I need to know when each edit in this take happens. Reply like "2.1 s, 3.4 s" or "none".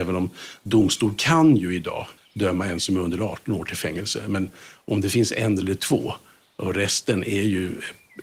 2.2 s